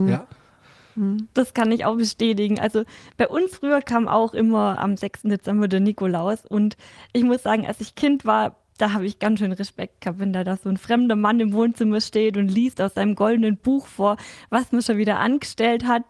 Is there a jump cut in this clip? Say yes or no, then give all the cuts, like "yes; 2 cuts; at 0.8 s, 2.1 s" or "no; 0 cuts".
no; 0 cuts